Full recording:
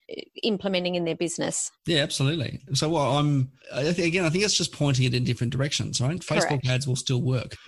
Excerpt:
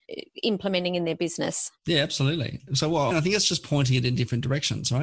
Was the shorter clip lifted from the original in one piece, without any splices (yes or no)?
no